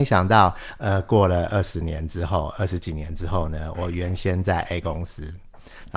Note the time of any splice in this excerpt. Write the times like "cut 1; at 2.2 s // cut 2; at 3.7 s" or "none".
none